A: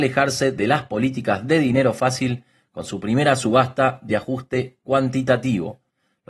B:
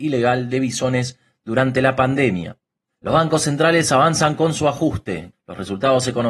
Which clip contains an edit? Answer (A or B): B